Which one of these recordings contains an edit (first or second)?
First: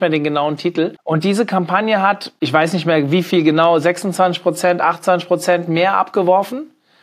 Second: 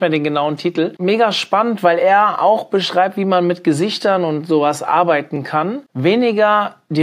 first